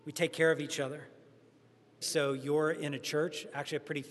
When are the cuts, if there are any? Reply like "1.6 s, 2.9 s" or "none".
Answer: 2.0 s